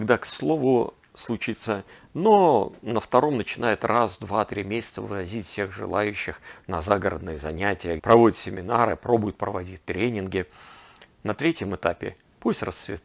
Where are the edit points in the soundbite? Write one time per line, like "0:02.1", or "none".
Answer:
0:08.0